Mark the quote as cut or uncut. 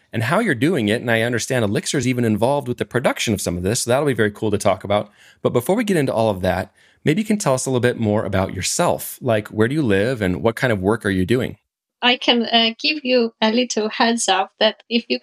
uncut